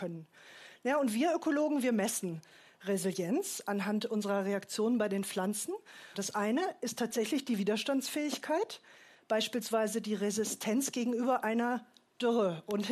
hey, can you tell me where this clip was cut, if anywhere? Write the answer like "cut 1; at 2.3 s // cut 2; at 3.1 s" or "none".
cut 1; at 6.1 s